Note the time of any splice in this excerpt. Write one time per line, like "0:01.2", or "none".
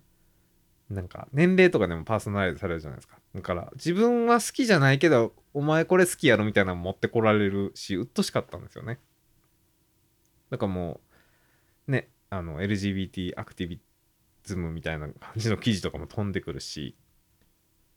0:03.2